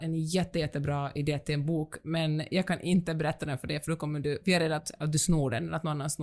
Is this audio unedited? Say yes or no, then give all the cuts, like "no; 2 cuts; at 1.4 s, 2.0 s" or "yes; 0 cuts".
yes; 0 cuts